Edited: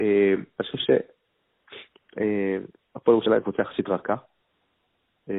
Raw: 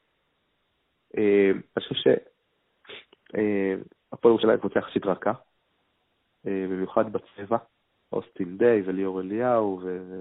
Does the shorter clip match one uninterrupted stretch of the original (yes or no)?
yes